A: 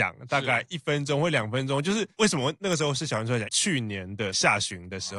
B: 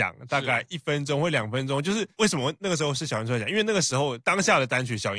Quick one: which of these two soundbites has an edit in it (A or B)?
A